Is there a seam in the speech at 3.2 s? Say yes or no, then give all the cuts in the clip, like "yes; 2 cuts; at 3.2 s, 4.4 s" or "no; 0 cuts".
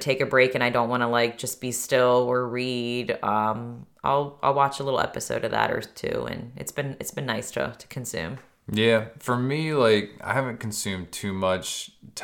no; 0 cuts